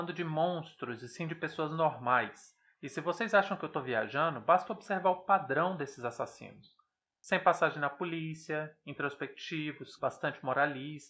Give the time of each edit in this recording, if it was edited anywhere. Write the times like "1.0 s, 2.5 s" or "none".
10.0 s

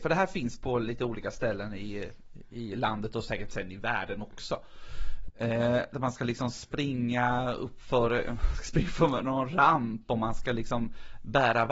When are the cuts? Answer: 5.3 s

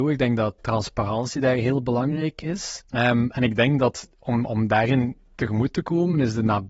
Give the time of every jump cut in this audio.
2.8 s

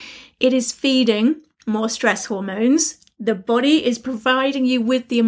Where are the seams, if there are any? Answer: none

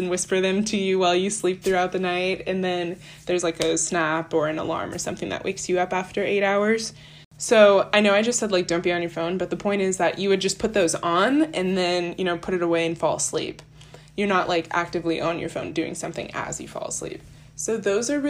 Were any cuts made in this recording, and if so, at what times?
none

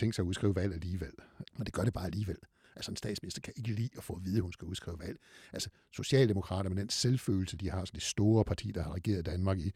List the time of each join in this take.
1.4 s

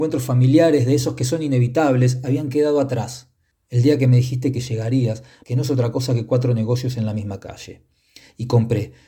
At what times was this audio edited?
3.5 s, 5.4 s

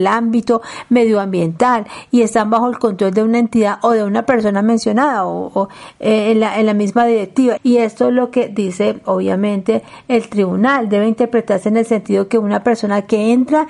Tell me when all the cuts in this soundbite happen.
7.6 s, 9.1 s

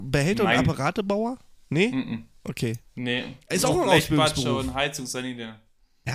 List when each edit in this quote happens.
none

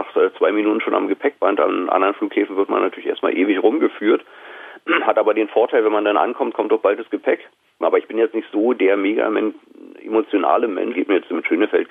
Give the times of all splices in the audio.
7.8 s, 10.9 s

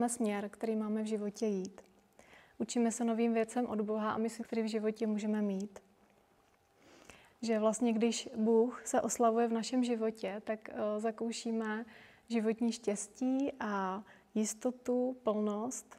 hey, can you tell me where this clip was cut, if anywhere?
4.4 s, 7.3 s

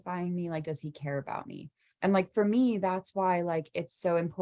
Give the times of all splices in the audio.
none

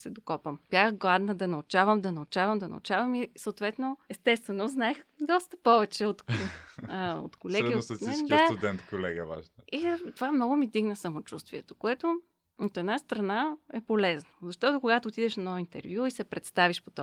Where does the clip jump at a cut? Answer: none

